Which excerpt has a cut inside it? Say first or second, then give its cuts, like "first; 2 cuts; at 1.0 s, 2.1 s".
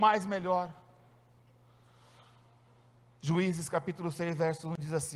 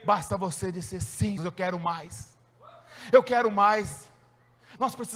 second; 1 cut; at 1.4 s